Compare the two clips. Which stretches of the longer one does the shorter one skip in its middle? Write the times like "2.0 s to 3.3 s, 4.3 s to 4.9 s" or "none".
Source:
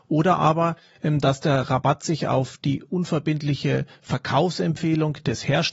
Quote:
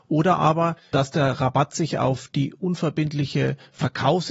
0.9 s to 1.2 s